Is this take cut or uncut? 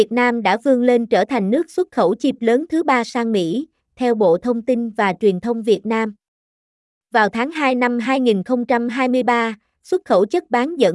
cut